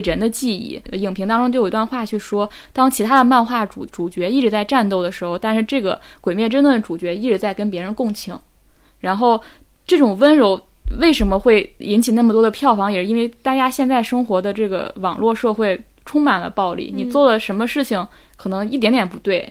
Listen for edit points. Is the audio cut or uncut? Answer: uncut